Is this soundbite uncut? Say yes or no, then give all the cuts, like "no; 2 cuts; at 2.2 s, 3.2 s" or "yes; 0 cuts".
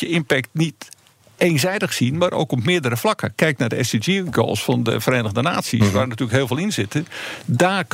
yes; 0 cuts